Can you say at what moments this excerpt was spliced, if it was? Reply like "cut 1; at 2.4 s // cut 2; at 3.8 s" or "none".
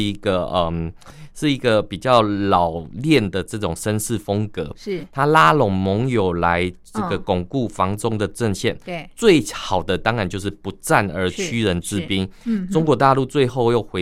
none